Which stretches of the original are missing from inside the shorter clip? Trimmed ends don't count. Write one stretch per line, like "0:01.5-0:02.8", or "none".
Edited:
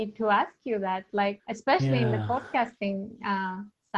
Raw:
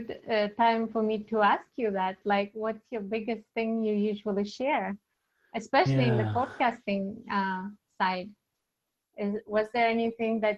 0:02.5-0:05.4